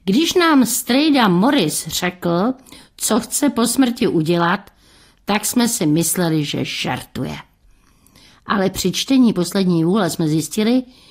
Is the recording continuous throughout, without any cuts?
yes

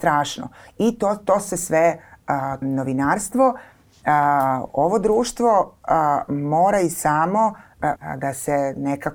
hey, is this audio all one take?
no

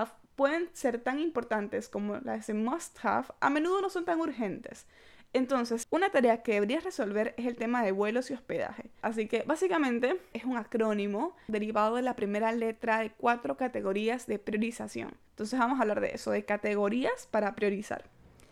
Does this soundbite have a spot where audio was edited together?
yes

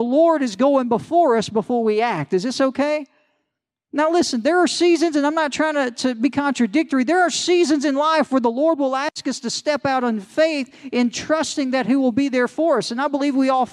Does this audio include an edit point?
no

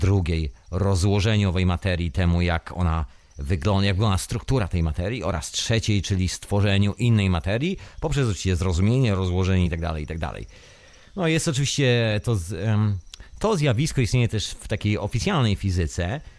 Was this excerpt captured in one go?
yes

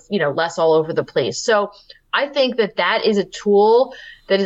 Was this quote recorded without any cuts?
yes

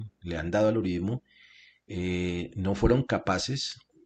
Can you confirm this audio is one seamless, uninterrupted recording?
yes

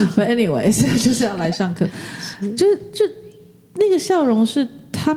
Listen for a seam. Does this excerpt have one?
no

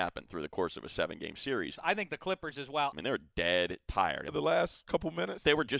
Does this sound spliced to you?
yes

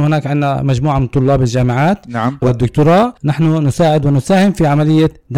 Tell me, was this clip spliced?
yes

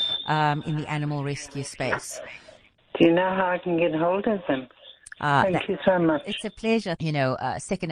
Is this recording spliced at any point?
yes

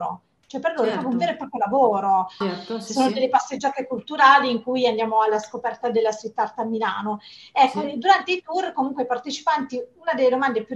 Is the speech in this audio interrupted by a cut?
yes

